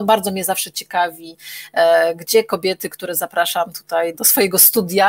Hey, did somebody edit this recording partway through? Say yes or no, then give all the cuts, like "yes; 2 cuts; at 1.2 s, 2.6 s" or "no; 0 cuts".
yes; 1 cut; at 4.1 s